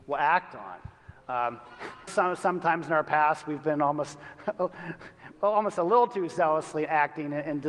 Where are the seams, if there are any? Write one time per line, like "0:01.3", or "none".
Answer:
0:02.1
0:05.3